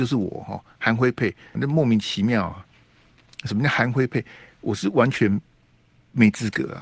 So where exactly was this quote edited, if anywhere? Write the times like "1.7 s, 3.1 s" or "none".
1.5 s

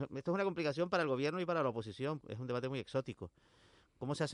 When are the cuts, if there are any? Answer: 2.2 s

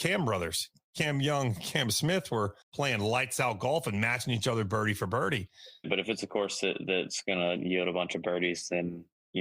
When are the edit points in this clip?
2.6 s, 5.8 s

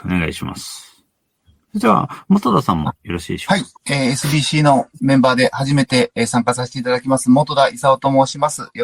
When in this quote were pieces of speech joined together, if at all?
3.7 s

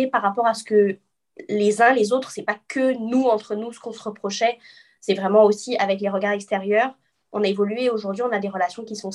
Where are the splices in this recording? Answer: none

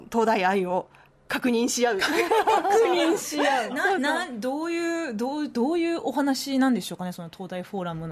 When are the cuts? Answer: none

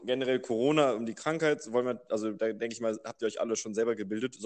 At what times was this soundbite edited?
none

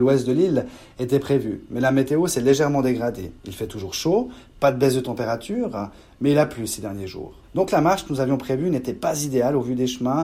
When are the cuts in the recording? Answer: 3.4 s, 7.4 s

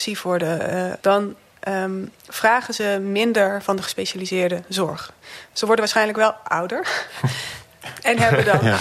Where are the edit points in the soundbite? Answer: 1.0 s

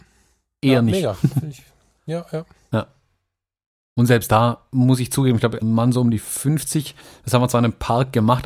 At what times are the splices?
5.6 s

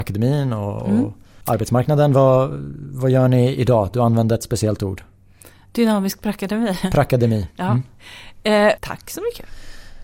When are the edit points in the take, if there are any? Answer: 8.8 s

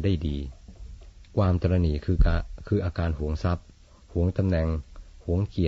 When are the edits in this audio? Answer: 1.3 s

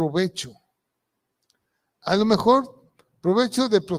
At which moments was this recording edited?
none

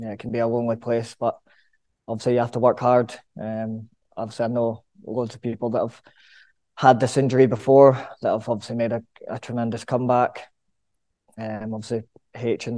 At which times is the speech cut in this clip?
none

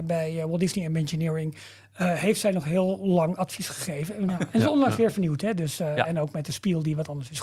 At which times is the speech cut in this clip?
4.3 s

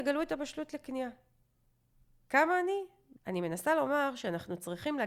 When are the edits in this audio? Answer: 3.2 s

